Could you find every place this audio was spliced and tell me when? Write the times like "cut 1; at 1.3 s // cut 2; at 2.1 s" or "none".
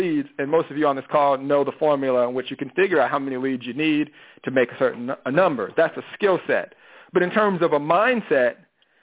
none